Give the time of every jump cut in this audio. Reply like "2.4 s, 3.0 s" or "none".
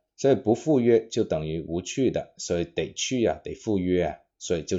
none